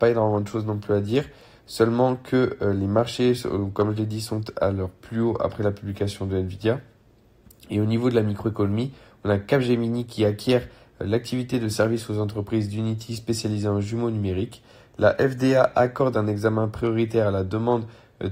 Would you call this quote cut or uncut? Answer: uncut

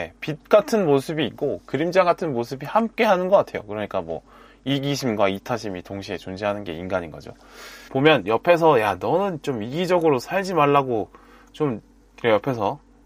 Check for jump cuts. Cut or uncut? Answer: cut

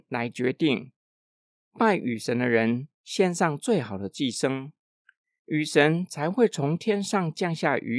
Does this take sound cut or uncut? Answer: cut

